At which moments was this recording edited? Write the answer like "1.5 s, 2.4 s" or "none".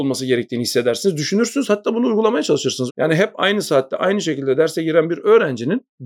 2.9 s